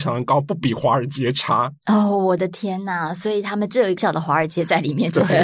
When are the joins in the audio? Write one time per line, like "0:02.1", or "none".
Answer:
0:04.0